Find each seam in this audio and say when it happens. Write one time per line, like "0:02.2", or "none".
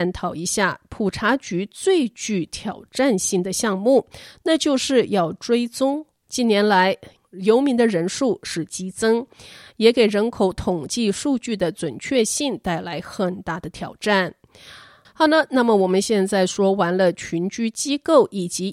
0:06.2
0:15.0